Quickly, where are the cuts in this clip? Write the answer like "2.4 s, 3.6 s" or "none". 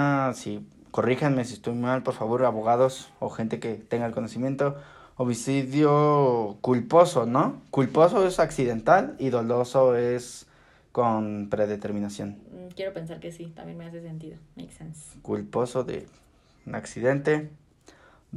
none

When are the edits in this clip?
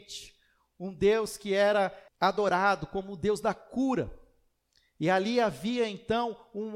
2.1 s

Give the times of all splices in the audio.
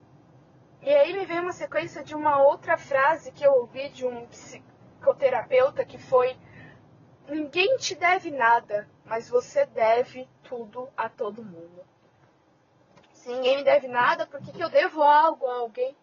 7.2 s, 13.0 s

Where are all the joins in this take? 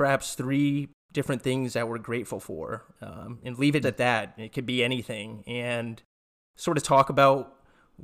3.8 s

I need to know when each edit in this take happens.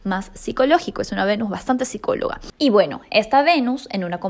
none

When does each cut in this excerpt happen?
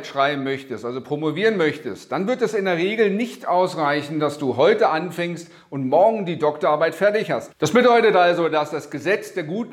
7.5 s

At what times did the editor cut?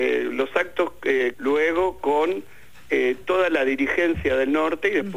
1.3 s

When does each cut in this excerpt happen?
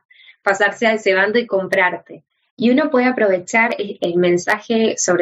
2.5 s, 4.0 s

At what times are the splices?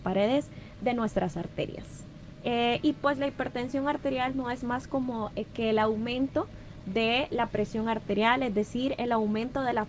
2.4 s

